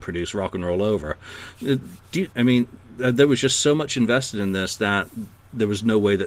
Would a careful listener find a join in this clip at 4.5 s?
no; 1 cut; at 2.3 s

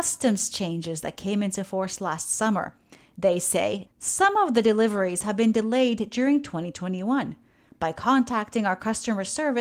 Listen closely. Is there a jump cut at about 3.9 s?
yes; 1 cut; at 3.9 s

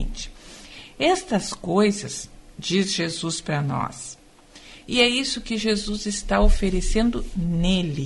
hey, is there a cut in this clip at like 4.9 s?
yes; 1 cut; at 4.9 s

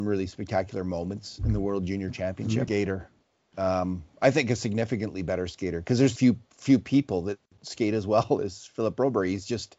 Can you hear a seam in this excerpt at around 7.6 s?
no; 2 cuts; at 2.7 s, 6.2 s

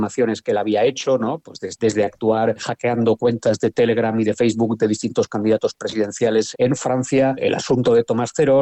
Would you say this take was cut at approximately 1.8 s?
yes; 1 cut; at 1.8 s

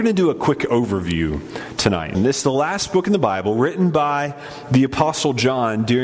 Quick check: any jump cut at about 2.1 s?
yes; 1 cut; at 2.1 s

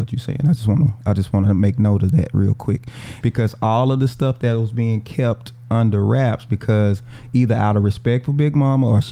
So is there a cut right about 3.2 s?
yes; 1 cut; at 3.2 s

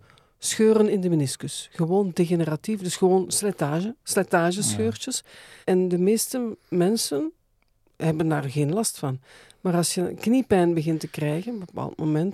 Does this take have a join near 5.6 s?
yes; 1 cut; at 5.6 s

